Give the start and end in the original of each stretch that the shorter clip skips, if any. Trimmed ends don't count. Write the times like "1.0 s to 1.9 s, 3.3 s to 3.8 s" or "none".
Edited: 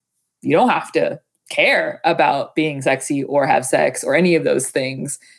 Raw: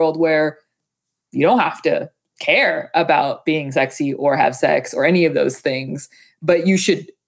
none